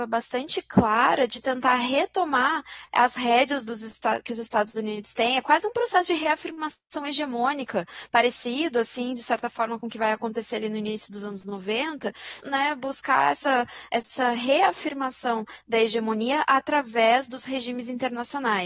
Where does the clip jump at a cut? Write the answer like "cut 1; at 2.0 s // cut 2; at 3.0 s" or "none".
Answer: cut 1; at 12.4 s